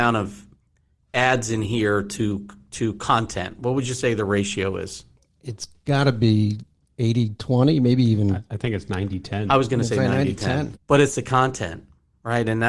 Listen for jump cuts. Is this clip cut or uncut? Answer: cut